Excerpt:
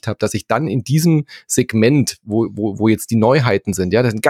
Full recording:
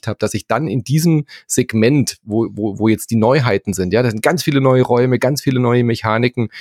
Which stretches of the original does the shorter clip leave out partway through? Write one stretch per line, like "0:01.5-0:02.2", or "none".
none